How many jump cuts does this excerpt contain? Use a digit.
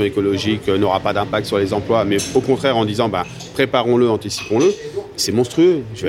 0